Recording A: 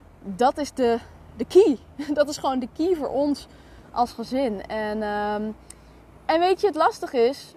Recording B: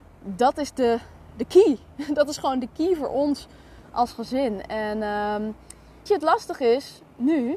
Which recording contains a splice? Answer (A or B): B